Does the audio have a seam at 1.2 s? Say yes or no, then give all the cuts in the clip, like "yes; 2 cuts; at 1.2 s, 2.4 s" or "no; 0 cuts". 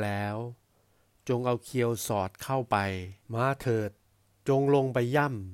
no; 1 cut; at 3.2 s